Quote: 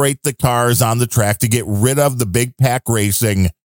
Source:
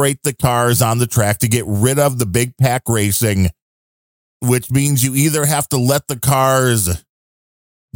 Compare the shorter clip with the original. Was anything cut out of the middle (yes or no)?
no